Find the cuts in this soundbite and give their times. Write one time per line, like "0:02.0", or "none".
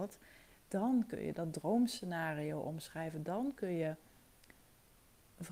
none